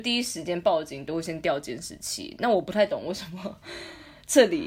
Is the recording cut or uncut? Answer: uncut